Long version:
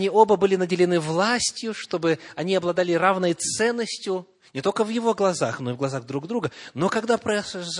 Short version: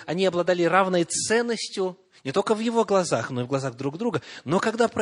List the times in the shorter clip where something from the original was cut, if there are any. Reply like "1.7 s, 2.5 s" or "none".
none